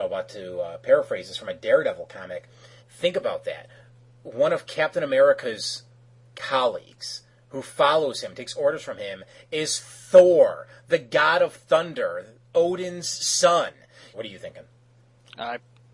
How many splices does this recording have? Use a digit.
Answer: 2